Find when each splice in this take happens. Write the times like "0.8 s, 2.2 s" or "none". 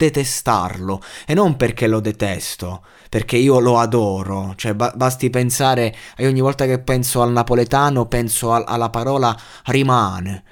none

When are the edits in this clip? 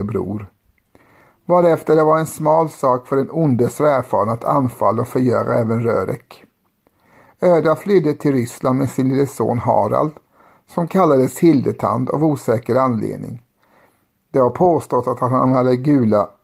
none

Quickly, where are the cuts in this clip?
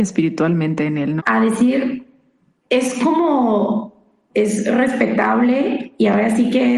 1.2 s, 4.3 s

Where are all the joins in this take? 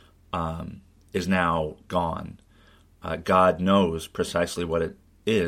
none

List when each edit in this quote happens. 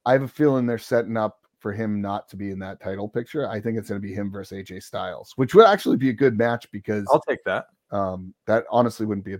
7.8 s

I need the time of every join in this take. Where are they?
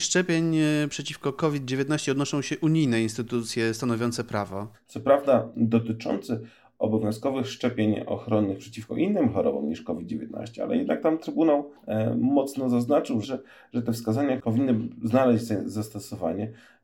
4.7 s, 13.2 s, 14.4 s

